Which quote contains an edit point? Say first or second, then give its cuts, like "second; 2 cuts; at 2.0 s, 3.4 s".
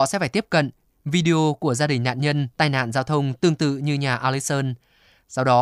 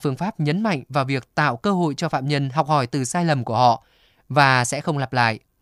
first; 1 cut; at 0.9 s